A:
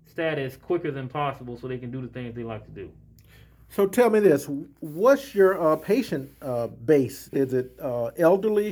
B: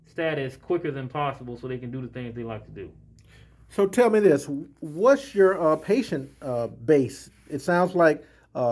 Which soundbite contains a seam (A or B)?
A